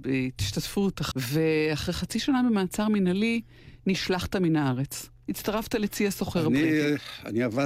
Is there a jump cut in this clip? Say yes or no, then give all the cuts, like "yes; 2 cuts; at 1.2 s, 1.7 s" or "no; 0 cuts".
yes; 1 cut; at 1.1 s